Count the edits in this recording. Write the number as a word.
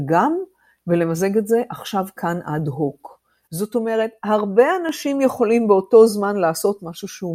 one